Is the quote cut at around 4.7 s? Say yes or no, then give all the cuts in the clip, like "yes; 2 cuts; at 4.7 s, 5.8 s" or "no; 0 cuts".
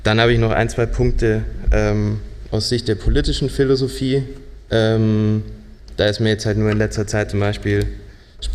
yes; 1 cut; at 4.7 s